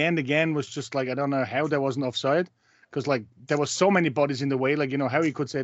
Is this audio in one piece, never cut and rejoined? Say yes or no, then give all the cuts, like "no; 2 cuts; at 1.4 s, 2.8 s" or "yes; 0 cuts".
yes; 0 cuts